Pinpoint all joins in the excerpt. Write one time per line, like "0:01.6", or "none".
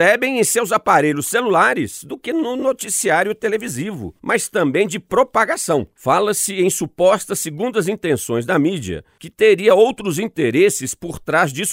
0:04.2
0:06.0